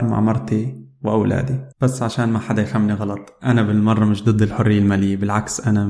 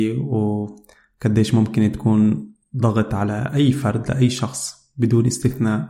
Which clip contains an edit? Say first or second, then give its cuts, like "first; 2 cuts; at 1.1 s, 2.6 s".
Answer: first; 1 cut; at 1.7 s